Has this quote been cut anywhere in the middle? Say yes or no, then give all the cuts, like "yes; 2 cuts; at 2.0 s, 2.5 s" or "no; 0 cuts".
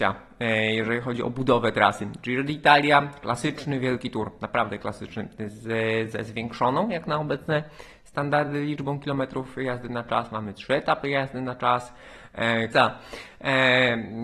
yes; 1 cut; at 12.7 s